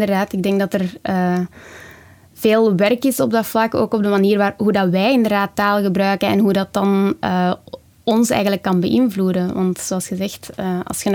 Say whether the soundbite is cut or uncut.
uncut